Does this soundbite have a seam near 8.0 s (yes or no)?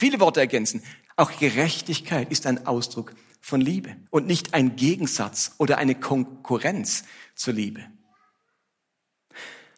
no